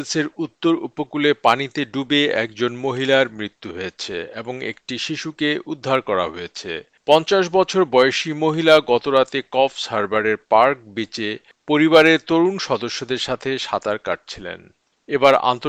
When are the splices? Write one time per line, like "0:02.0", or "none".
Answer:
none